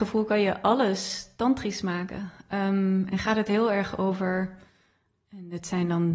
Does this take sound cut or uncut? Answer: uncut